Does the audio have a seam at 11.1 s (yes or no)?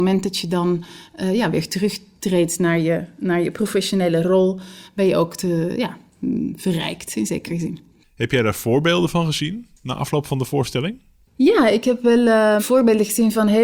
no